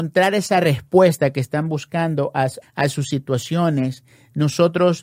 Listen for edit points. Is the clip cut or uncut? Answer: cut